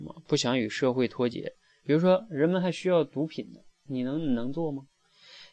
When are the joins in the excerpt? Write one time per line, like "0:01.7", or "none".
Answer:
0:01.8

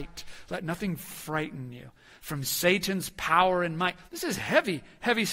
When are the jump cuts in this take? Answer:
0:04.1

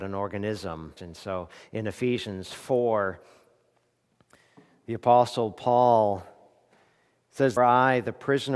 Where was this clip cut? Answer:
0:01.0
0:07.6

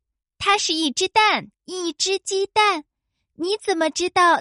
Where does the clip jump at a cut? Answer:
0:01.5

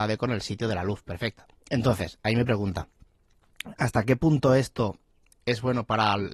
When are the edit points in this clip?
0:01.5

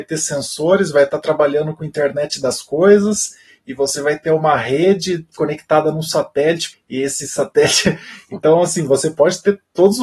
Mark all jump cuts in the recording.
0:06.7

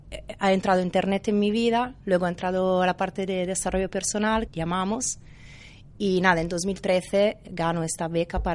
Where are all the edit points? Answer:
0:04.5
0:07.5

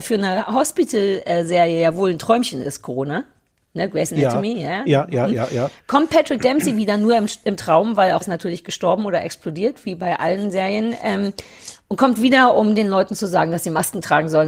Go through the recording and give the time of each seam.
0:08.2

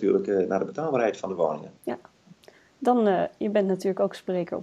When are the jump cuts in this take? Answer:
0:01.8

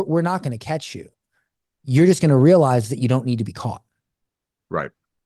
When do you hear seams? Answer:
none

